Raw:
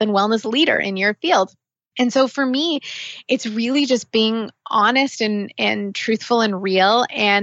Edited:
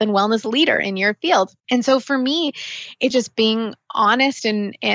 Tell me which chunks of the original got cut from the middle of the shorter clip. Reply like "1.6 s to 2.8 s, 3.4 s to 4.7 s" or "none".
1.6 s to 1.9 s, 3.4 s to 3.9 s